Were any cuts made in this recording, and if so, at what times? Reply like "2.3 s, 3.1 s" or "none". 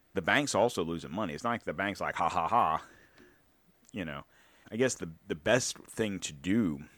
4.6 s